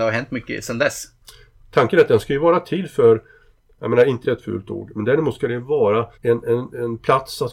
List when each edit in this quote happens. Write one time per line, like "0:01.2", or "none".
0:04.2
0:06.1